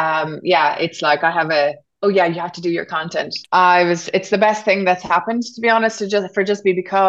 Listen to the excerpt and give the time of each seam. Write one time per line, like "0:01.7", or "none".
0:03.4